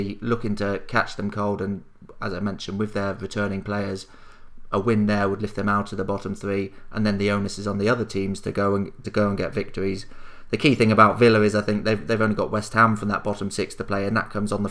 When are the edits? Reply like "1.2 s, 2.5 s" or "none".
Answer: 9.0 s